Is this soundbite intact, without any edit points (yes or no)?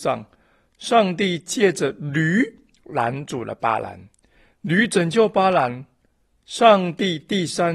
yes